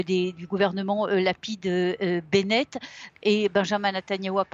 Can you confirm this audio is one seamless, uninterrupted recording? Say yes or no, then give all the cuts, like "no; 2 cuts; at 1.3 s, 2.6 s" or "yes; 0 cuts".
no; 1 cut; at 3.1 s